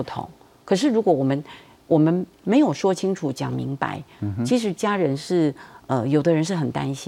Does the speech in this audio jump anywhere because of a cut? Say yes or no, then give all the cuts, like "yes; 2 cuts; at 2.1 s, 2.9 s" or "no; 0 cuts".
no; 0 cuts